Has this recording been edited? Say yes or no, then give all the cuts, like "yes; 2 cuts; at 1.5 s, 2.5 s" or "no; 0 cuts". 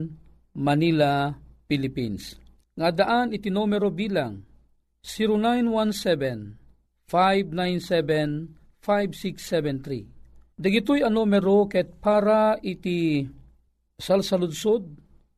yes; 2 cuts; at 2.6 s, 10.6 s